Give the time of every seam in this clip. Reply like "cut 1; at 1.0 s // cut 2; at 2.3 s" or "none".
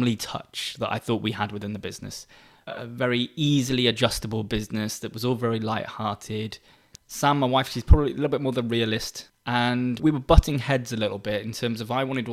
cut 1; at 6.9 s // cut 2; at 9.3 s